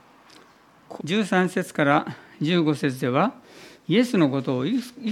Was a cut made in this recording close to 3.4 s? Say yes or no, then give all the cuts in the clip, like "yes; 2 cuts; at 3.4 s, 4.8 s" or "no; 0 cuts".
no; 1 cut; at 1.0 s